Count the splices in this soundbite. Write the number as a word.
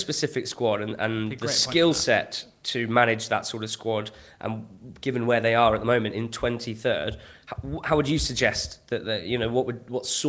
zero